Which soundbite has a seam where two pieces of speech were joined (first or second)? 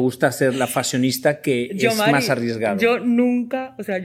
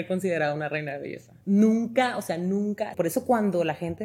second